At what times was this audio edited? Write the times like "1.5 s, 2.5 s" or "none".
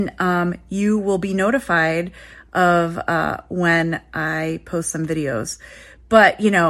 none